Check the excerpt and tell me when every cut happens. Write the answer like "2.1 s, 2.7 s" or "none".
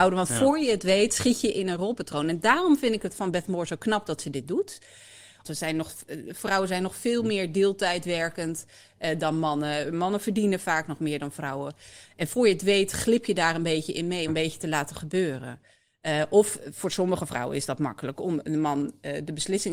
5.4 s, 14.3 s